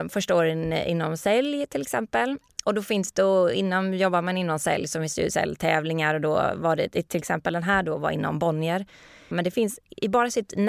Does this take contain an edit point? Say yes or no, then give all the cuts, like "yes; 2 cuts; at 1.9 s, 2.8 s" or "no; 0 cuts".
yes; 1 cut; at 9.3 s